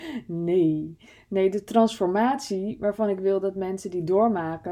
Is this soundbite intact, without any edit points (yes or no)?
yes